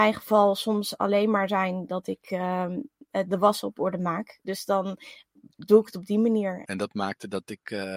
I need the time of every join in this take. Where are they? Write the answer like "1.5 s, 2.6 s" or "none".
4.4 s, 6.6 s